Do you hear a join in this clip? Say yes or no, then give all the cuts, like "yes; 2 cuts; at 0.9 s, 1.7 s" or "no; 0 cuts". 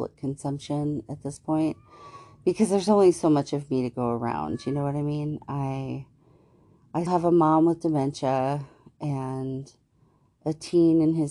yes; 1 cut; at 7.1 s